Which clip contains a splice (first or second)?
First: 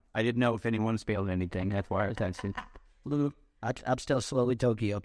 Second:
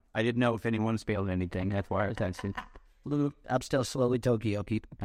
second